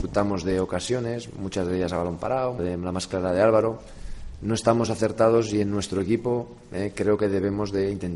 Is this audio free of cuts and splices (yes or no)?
no